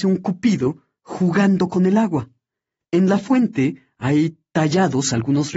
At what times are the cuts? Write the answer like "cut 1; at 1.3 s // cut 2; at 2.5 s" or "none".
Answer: none